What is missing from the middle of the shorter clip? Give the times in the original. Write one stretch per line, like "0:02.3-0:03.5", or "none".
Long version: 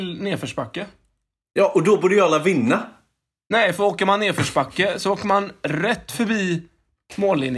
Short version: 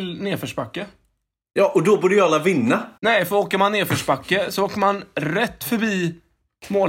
0:03.0-0:03.4